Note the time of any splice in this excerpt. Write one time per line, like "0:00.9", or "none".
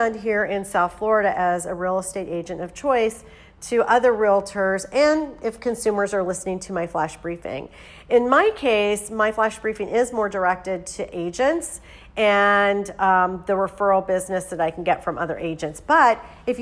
none

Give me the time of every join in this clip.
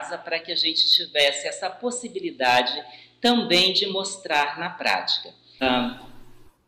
0:05.6

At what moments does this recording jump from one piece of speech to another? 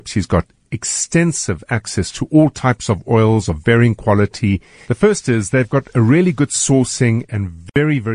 0:04.8

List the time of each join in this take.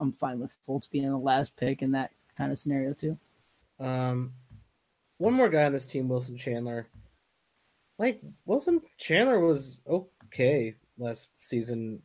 0:03.6

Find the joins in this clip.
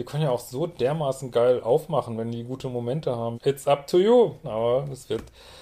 0:03.3
0:04.4

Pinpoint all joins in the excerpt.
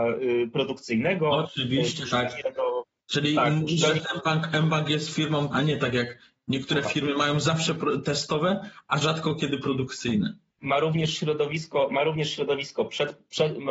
0:05.5

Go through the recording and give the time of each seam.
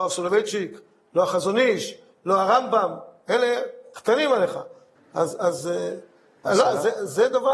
0:05.0
0:06.5

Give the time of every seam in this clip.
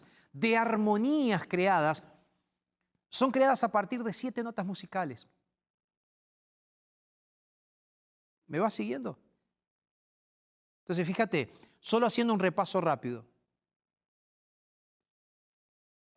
none

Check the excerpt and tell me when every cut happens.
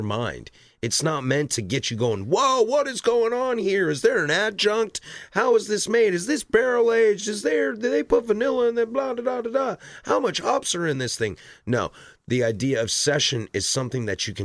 none

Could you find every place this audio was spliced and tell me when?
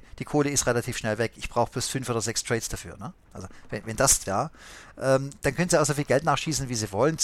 0:03.3
0:04.3

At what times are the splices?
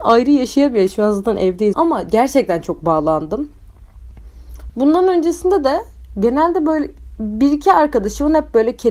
0:01.7
0:04.7

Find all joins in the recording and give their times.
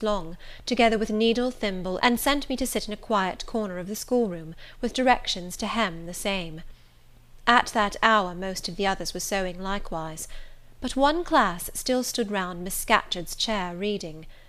0:02.0

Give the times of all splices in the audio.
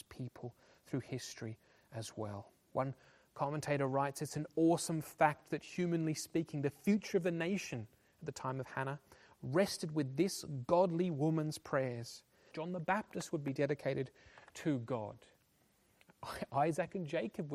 0:12.5

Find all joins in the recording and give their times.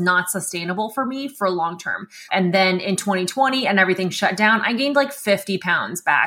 0:02.3

